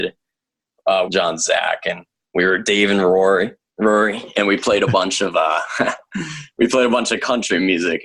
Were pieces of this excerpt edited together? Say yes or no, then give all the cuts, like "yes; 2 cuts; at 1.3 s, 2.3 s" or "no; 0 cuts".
yes; 1 cut; at 1.0 s